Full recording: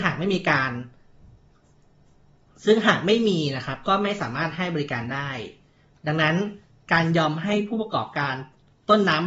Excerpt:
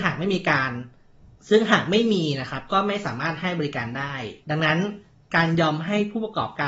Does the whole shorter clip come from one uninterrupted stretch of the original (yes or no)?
no